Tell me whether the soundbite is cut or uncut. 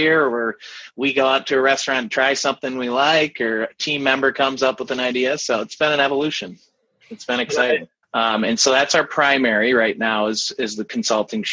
cut